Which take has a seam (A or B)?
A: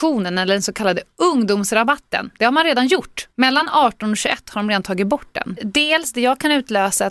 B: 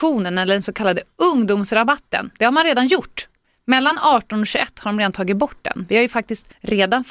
A